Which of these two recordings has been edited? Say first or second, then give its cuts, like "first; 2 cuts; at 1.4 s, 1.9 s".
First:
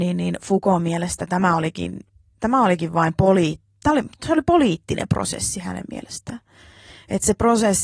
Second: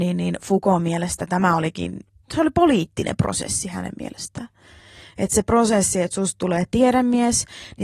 second; 1 cut; at 2.2 s